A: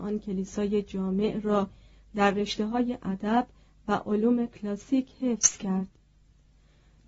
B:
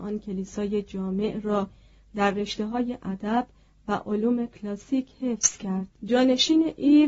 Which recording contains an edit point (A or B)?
B